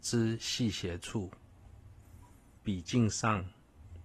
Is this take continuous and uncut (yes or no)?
no